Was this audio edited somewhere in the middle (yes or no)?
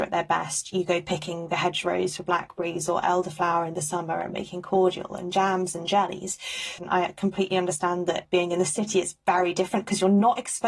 yes